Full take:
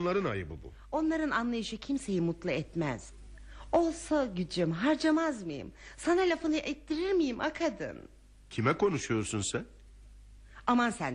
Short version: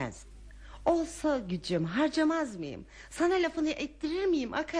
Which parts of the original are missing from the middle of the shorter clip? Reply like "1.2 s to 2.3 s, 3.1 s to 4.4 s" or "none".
none